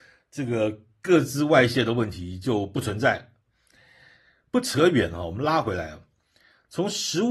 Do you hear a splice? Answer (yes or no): no